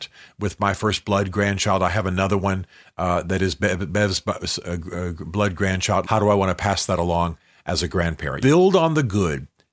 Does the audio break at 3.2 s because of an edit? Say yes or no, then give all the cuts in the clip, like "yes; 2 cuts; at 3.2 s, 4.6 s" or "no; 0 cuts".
no; 2 cuts; at 6.0 s, 8.4 s